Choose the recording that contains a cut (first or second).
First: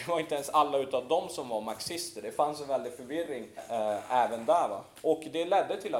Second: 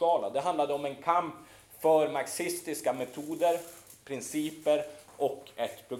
first